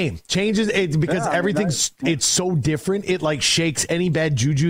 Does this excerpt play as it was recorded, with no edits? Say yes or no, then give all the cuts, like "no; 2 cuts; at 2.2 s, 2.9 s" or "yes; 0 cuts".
yes; 0 cuts